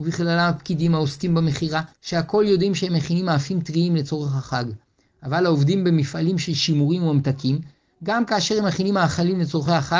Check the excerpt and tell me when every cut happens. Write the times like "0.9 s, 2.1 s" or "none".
1.9 s